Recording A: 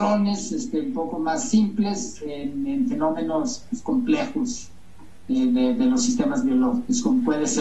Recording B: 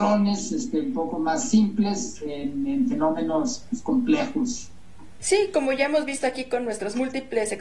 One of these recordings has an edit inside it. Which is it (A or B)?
B